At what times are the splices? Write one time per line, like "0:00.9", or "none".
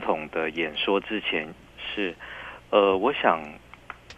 0:01.6

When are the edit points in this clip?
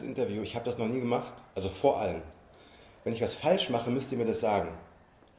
0:01.5

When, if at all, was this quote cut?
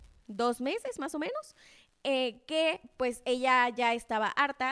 none

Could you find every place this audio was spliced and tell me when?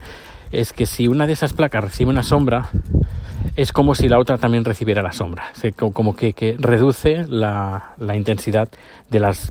none

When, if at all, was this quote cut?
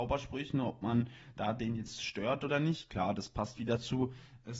none

